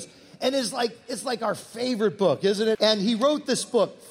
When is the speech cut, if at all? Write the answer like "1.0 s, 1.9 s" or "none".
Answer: 2.7 s